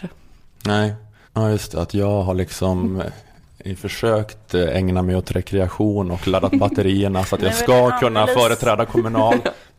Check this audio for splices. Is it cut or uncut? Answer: cut